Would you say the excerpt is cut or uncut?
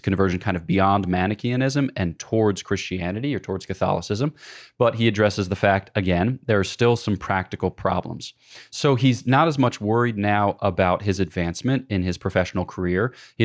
uncut